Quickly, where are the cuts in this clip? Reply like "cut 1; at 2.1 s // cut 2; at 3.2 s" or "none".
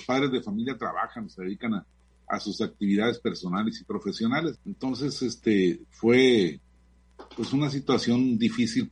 cut 1; at 4.5 s